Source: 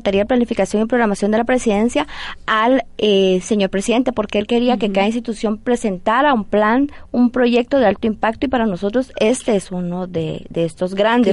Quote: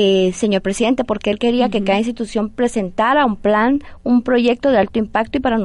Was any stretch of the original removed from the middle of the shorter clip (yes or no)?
no